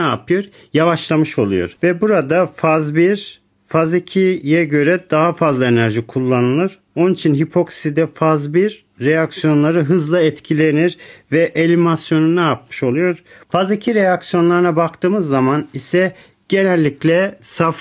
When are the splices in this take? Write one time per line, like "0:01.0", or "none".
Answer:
0:13.4